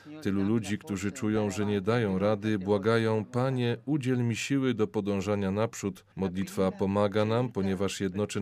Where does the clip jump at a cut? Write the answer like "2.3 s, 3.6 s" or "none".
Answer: 6.1 s